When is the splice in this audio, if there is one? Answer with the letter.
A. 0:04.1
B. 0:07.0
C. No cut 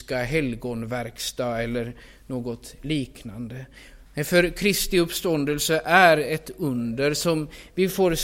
A